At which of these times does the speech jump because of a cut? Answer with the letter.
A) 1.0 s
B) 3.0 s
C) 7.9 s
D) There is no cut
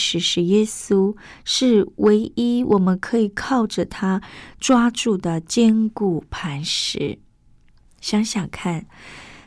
C